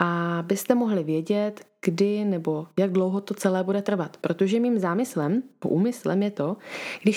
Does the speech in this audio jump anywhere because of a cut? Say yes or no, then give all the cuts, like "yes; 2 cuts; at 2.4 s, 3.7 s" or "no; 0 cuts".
no; 0 cuts